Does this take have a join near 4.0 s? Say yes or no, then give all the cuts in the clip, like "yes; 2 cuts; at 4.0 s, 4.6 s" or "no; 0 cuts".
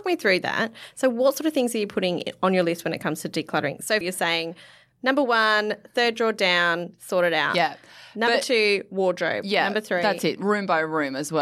yes; 1 cut; at 4.0 s